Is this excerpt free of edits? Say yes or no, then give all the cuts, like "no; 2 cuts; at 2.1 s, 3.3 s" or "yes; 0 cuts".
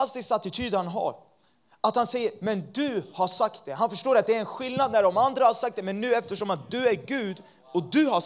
yes; 0 cuts